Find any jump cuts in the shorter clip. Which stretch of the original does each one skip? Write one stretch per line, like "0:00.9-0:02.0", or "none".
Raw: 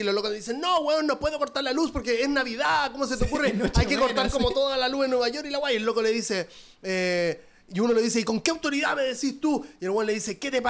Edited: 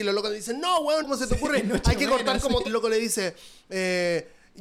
0:01.0-0:02.9
0:04.5-0:05.8